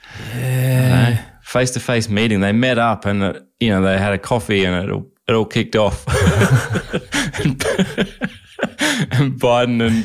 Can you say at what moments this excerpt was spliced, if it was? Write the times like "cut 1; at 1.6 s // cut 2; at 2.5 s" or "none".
none